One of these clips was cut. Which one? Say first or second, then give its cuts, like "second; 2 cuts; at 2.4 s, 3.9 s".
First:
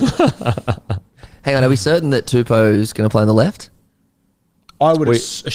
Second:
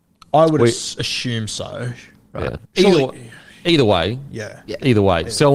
second; 1 cut; at 2.6 s